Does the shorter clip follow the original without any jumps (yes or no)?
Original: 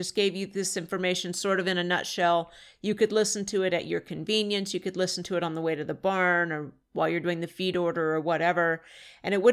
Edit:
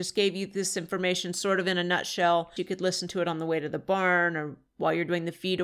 no